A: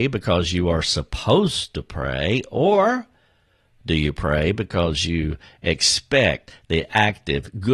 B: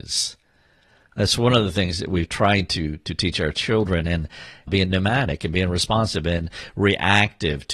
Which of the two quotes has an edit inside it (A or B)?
B